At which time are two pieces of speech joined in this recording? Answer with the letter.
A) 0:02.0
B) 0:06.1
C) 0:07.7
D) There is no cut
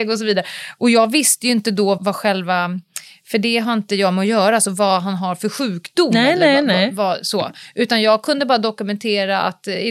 A